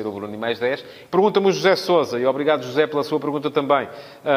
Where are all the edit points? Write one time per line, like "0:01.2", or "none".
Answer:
0:01.1

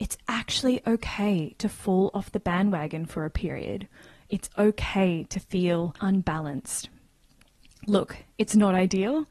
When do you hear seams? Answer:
0:06.0

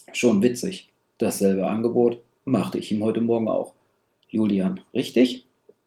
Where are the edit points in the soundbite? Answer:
0:04.2

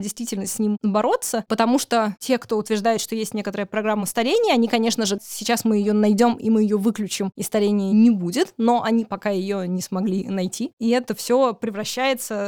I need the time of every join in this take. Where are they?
0:05.2
0:10.7

